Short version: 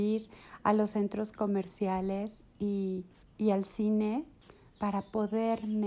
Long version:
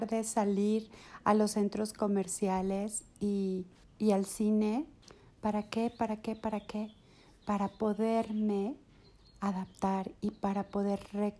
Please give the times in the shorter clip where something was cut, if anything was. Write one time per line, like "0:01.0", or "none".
0:04.7